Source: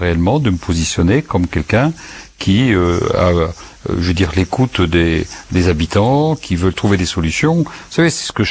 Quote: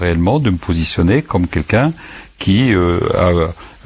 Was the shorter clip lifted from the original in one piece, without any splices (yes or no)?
yes